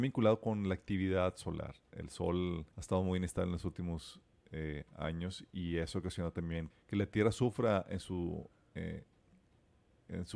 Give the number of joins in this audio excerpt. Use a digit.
2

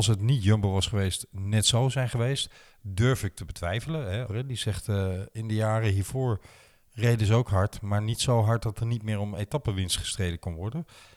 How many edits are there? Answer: 1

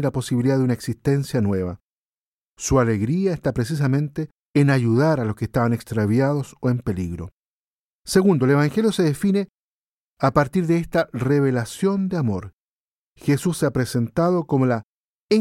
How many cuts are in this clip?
1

